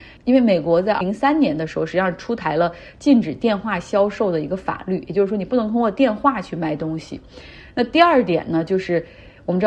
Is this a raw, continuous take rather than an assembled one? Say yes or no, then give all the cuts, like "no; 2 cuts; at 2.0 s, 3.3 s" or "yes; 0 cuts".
no; 1 cut; at 1.0 s